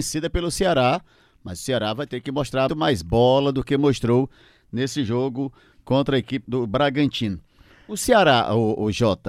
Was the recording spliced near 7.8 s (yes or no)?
no